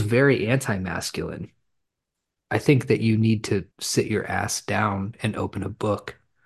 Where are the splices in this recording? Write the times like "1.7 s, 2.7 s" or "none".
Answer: 2.4 s, 3.7 s